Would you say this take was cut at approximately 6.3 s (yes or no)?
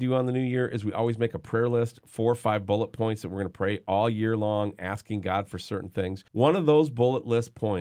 yes